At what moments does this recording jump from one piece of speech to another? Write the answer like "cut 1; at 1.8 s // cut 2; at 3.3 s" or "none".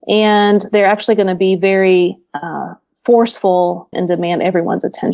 cut 1; at 3.9 s